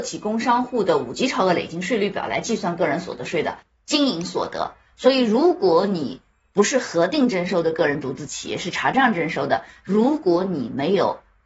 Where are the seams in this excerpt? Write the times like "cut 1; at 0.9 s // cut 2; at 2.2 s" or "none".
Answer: none

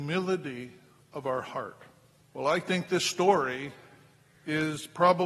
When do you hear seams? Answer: cut 1; at 2.2 s

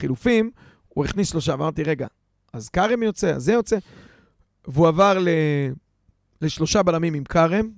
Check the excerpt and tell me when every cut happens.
none

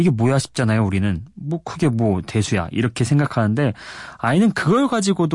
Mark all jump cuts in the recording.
none

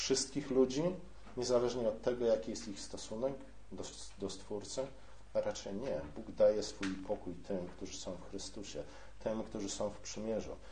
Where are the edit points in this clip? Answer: none

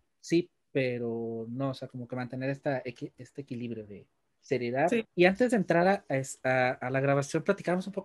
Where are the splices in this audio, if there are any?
cut 1; at 5.0 s

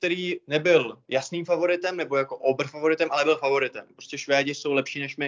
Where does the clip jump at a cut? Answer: none

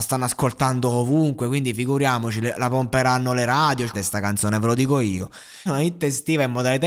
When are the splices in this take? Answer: cut 1; at 3.9 s // cut 2; at 5.7 s

